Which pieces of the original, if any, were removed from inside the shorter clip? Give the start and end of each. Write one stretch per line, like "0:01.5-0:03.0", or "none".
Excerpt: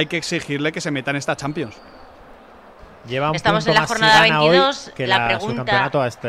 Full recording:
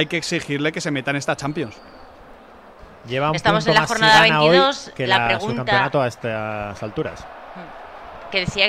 none